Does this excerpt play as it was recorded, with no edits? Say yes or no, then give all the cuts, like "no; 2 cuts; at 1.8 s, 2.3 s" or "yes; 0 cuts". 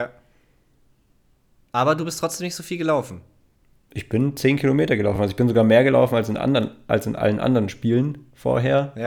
yes; 0 cuts